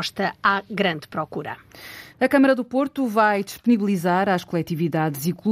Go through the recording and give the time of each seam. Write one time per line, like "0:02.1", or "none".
0:02.1